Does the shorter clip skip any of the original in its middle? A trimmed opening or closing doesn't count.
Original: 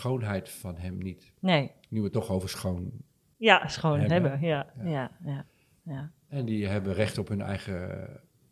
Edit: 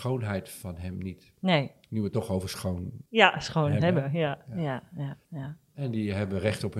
yes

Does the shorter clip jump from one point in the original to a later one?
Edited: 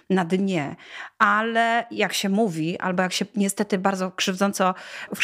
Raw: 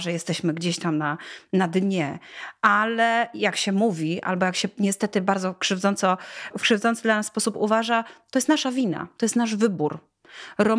no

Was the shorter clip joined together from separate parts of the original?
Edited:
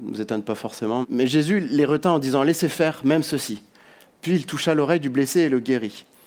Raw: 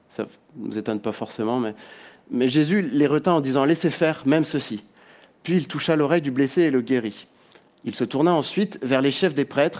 yes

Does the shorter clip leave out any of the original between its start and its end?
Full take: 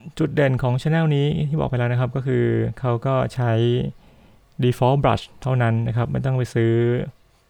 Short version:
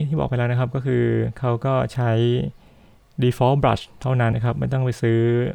yes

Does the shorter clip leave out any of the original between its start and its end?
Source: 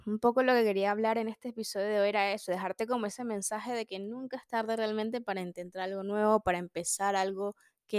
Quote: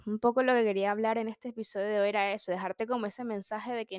no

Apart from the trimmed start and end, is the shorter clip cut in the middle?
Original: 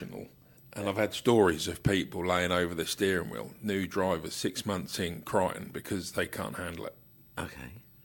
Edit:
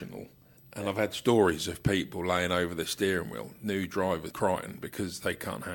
yes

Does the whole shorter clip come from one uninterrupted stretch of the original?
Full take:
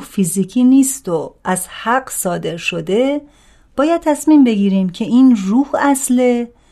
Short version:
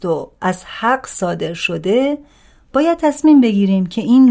yes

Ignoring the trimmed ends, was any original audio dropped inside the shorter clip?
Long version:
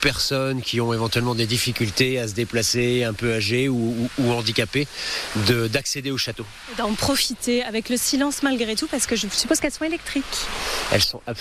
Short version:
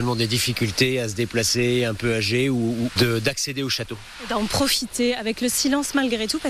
yes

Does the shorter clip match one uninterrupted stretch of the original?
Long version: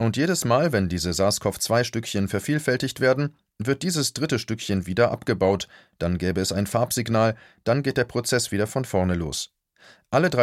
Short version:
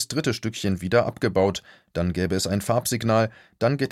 yes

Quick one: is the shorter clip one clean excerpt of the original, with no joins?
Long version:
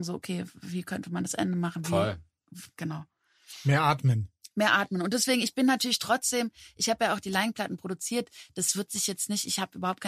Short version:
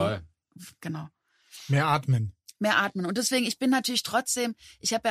yes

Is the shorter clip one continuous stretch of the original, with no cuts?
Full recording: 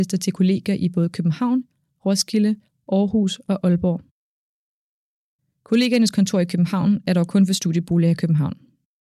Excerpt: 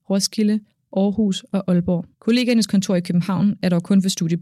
no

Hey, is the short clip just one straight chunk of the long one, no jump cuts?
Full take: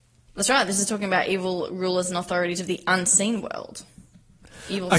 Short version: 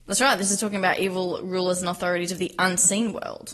yes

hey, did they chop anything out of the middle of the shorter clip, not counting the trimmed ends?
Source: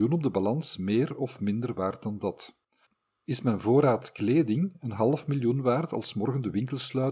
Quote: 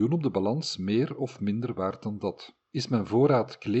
yes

